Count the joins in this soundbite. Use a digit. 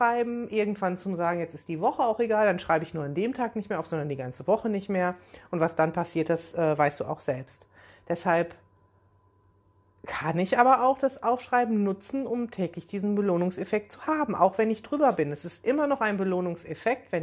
0